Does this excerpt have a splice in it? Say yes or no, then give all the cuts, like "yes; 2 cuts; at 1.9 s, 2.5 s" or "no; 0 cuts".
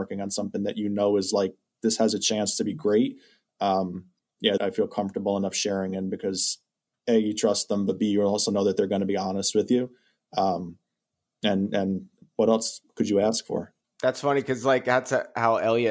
yes; 1 cut; at 4.6 s